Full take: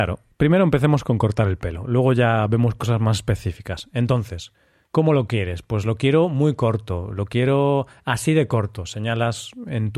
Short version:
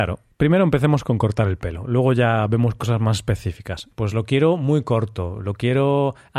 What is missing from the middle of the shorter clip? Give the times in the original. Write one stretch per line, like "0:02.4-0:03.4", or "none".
0:03.9-0:05.6